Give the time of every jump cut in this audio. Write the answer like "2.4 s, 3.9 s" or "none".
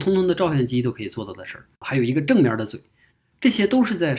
1.8 s

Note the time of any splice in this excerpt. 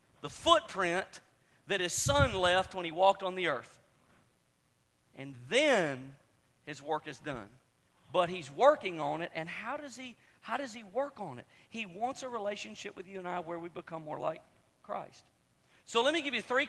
8.0 s

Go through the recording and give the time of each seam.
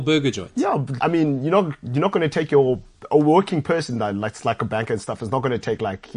1.0 s

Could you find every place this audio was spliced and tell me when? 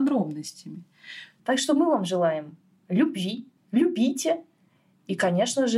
1.4 s, 3.6 s

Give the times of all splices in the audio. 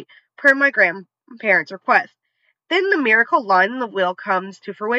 none

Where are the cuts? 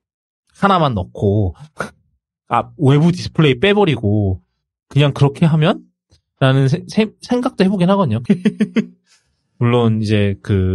8.3 s

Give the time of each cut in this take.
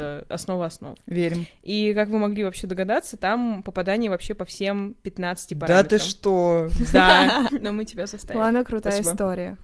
7.5 s

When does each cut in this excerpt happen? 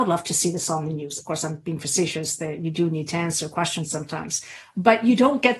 1.2 s

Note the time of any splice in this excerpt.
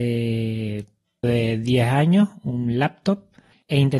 1.2 s

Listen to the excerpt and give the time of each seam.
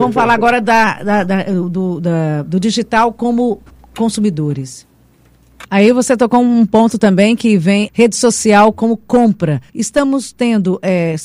5.6 s, 7.9 s, 9.7 s

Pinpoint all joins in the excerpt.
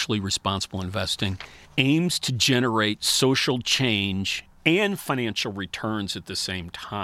1.7 s

